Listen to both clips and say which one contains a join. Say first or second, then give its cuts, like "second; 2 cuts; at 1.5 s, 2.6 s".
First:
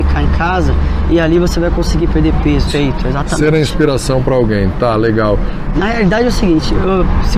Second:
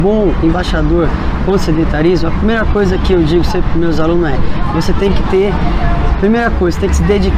first; 2 cuts; at 2.7 s, 5.7 s